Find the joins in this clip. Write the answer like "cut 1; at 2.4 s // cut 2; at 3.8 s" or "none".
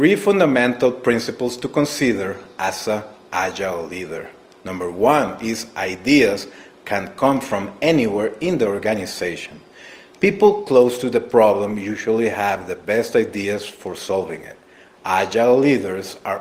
none